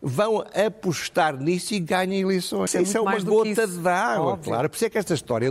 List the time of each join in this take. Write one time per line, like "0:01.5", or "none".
0:02.7